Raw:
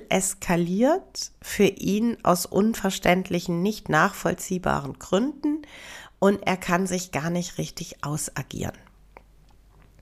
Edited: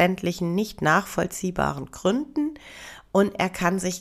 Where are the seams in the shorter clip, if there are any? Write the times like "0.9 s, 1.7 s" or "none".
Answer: none